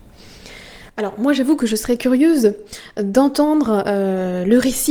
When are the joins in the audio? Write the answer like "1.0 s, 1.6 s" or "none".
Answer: none